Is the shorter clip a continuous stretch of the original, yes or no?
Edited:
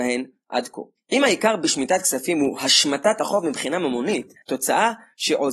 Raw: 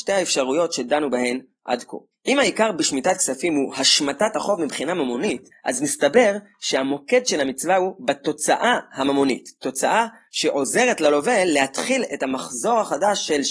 no